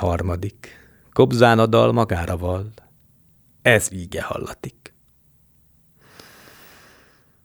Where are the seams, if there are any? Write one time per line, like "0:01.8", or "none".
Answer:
none

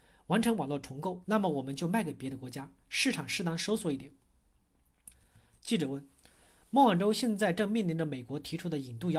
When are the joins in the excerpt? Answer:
0:01.2
0:05.1

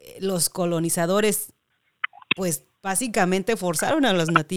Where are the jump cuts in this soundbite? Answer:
none

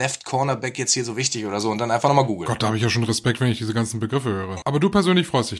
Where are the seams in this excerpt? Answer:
0:04.6

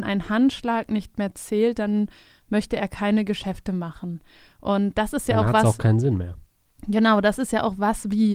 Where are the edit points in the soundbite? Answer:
none

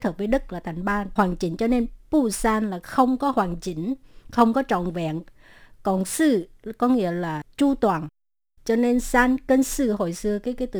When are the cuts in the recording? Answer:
0:01.2

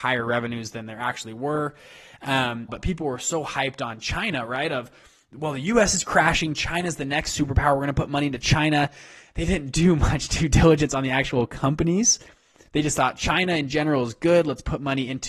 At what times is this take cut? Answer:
0:02.7

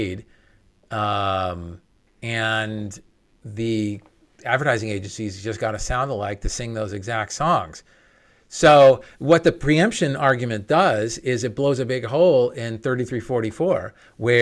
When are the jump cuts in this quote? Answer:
0:02.1

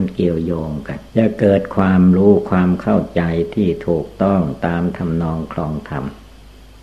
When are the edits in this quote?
0:01.1

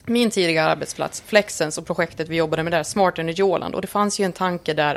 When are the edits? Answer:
none

